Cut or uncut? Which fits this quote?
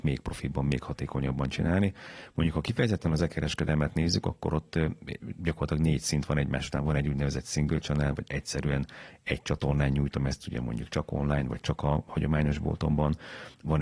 uncut